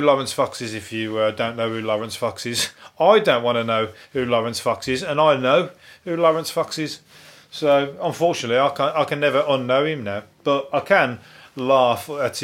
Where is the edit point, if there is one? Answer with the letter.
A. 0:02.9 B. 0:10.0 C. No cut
C